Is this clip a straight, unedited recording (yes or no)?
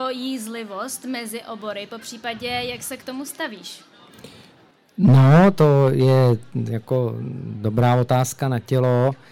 yes